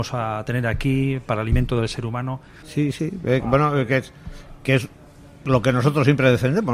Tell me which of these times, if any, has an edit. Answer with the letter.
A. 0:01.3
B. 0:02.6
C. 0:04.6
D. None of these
B